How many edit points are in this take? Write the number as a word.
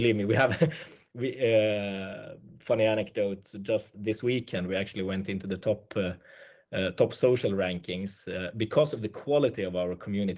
one